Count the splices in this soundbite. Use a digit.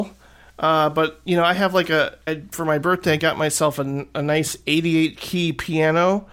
1